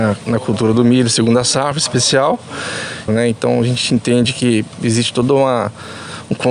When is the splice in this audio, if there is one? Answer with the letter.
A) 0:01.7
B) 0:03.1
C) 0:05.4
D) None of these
B